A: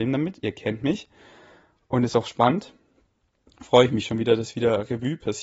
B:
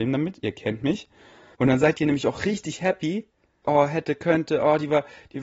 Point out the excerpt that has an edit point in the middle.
B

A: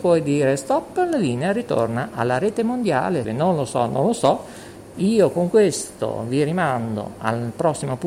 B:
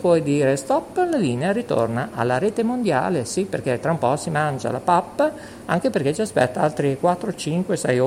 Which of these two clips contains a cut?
A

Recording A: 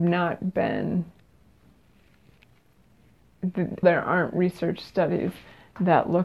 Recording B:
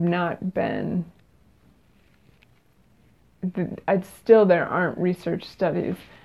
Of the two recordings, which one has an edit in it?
A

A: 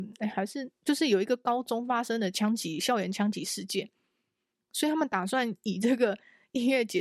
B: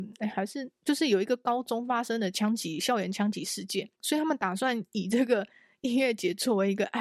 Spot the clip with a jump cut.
B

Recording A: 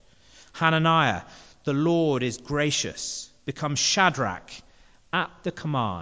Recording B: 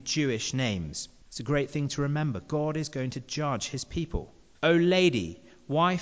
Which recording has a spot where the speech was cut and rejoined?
B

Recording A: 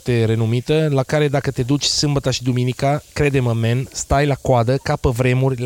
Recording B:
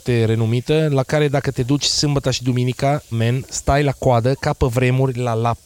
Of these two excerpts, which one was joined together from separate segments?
B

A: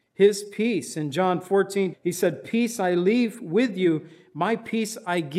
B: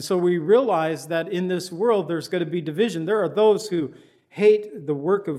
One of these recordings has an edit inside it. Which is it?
A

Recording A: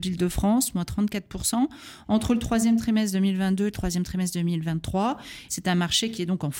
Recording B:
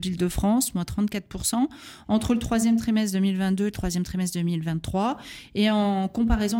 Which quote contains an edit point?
A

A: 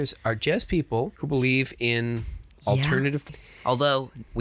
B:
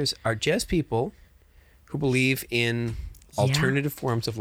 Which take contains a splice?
A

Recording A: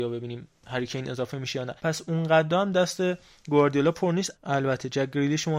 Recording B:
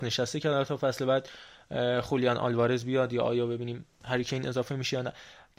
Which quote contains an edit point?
A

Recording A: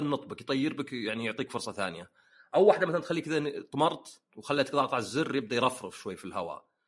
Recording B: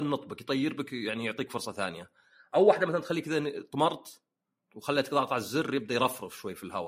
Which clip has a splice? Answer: A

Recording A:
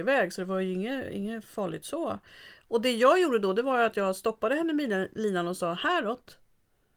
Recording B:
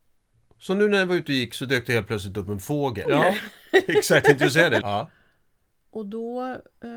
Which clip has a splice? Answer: B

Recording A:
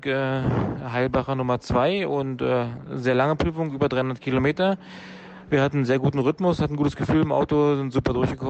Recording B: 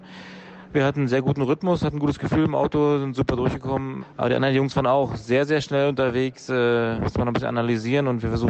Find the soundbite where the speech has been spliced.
B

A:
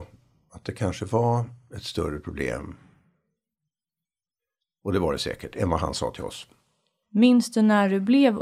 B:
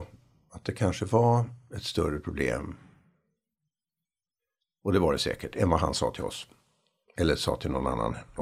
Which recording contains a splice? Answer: A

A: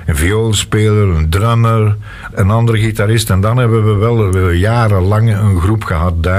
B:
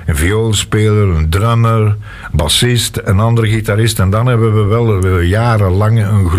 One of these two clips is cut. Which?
A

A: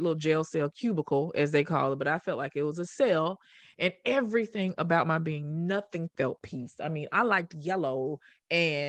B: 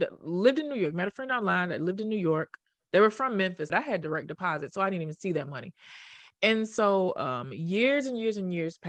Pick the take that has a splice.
B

